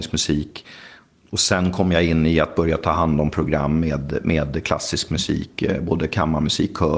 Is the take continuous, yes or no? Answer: yes